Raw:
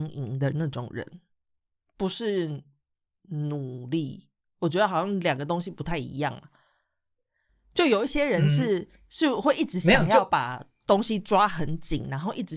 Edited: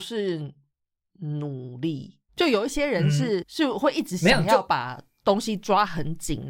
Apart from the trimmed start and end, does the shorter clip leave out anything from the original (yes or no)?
yes